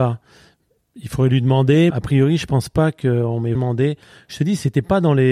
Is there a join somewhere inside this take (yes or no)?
yes